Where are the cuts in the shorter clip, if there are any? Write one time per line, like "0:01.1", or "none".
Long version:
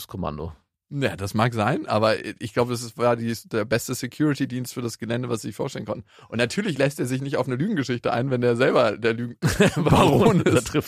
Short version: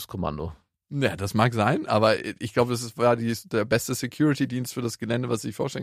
none